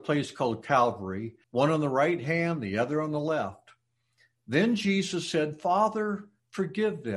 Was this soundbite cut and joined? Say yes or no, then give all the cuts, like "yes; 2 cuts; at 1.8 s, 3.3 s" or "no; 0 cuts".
yes; 1 cut; at 1.4 s